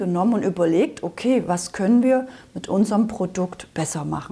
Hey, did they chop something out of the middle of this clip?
no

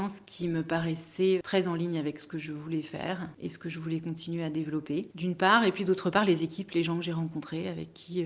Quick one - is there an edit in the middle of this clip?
no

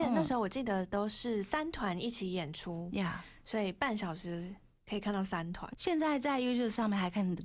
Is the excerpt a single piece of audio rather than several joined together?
yes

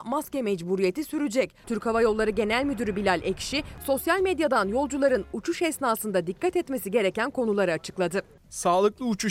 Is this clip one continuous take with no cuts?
no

